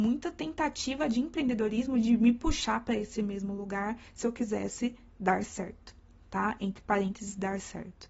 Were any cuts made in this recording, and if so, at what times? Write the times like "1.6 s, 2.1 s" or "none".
none